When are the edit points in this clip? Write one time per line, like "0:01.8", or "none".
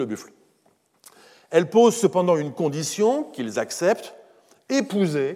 none